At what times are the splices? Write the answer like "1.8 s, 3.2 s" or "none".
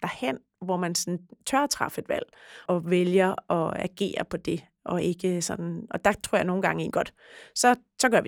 2.7 s, 6.9 s